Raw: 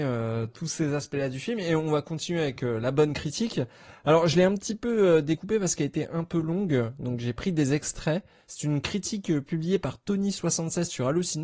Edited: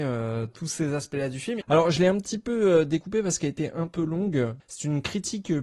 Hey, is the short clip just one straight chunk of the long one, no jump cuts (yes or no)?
no